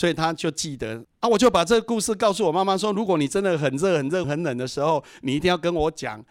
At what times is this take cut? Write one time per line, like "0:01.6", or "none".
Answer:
0:01.0
0:04.2